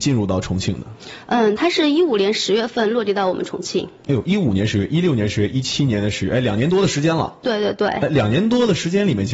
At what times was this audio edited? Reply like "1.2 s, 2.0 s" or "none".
none